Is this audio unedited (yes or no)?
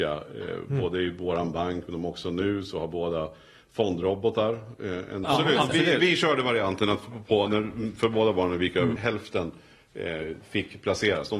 no